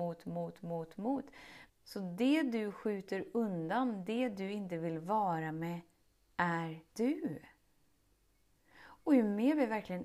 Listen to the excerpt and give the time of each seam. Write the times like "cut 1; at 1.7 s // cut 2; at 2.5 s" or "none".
cut 1; at 1.7 s // cut 2; at 6.9 s

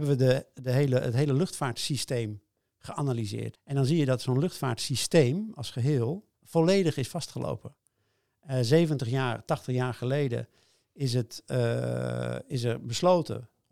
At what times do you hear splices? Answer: cut 1; at 3.5 s

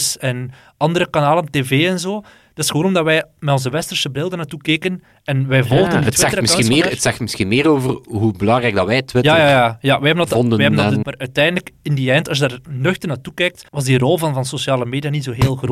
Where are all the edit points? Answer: cut 1; at 11.0 s // cut 2; at 13.7 s

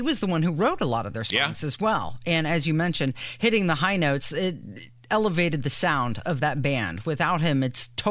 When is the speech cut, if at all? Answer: none

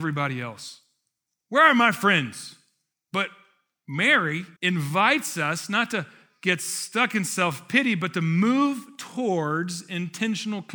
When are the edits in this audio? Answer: cut 1; at 1.4 s // cut 2; at 2.9 s // cut 3; at 4.6 s

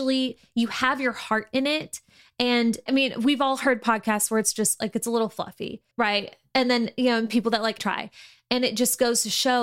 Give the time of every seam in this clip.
cut 1; at 2.9 s // cut 2; at 5.9 s // cut 3; at 7.8 s

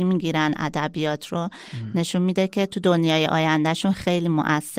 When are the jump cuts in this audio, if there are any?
none

